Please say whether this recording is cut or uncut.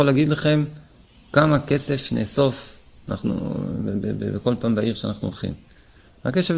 uncut